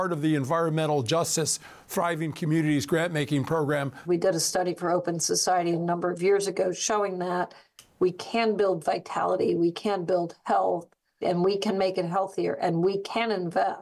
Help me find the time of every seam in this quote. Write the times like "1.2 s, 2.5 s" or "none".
4.0 s, 11.2 s